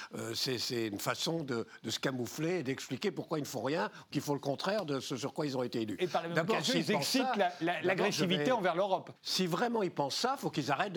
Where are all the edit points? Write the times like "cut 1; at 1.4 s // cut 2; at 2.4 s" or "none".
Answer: cut 1; at 9.2 s